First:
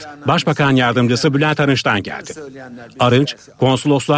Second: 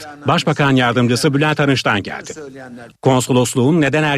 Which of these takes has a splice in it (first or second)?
second